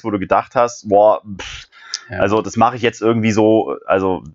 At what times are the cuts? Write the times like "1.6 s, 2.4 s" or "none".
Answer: none

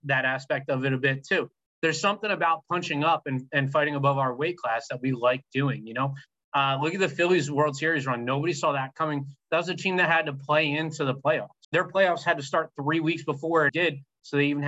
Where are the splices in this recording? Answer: 11.6 s, 13.7 s

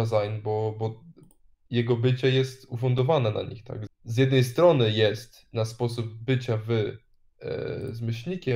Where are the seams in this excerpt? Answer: 3.9 s

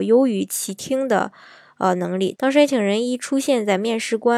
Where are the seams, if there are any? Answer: 2.4 s

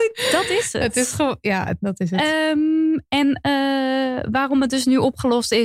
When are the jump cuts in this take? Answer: 1.8 s

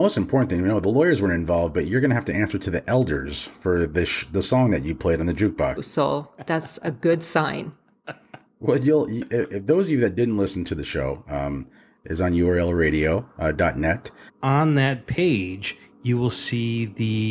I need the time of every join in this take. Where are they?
5.8 s, 14.3 s

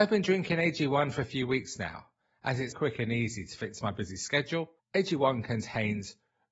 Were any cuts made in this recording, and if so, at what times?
2.7 s, 4.8 s

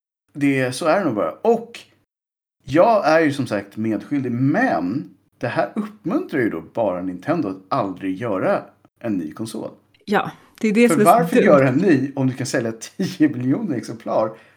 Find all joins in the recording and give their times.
none

